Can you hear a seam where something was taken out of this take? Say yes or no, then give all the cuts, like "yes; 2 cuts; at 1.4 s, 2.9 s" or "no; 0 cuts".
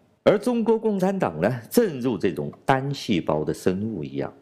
no; 0 cuts